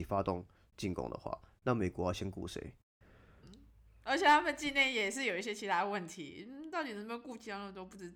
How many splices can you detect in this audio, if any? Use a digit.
1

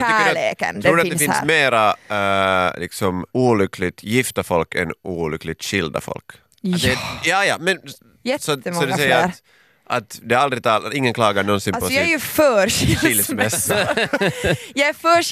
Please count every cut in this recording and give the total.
1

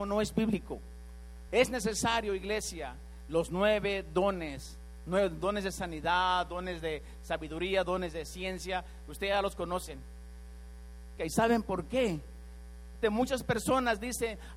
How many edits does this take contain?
3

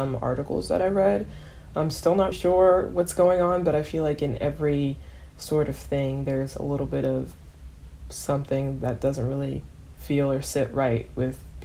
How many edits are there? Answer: 1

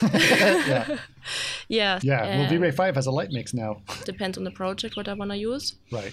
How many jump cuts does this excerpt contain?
2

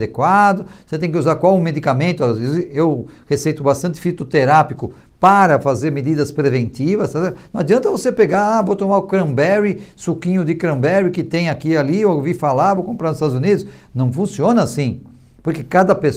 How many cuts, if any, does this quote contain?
0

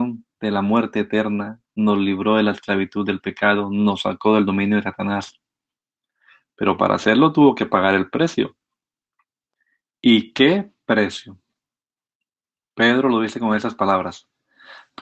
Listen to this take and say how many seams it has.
0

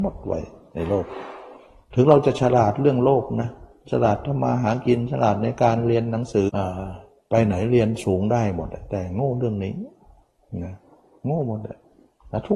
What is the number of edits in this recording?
1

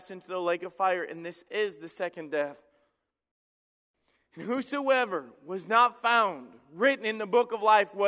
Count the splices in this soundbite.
0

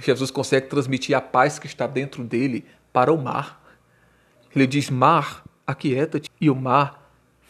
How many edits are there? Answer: 2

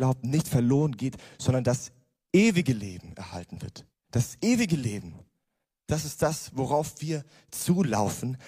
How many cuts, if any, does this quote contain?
0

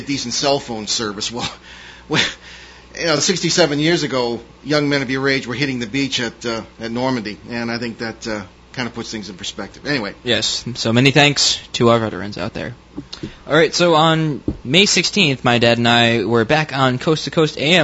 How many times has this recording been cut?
0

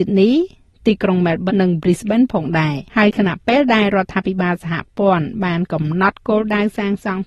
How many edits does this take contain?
2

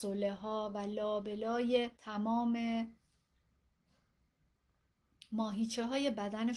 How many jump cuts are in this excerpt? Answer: 1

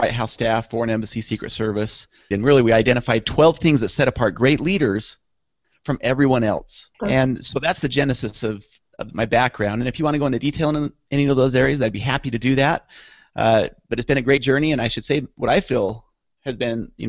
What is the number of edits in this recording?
2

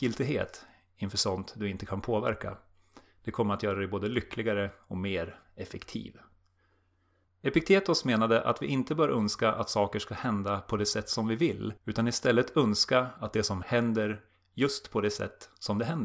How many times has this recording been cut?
3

